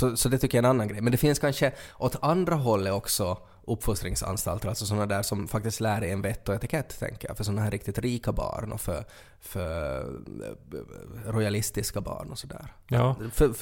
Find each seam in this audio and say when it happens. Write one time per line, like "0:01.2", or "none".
none